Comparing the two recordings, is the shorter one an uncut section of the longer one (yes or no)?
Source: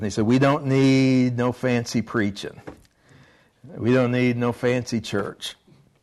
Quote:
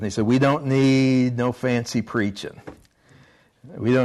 yes